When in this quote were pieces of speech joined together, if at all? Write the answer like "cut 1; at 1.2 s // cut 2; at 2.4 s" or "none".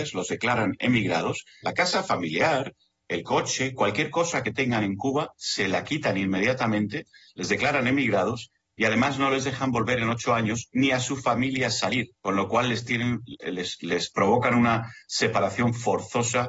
cut 1; at 1.6 s // cut 2; at 12.2 s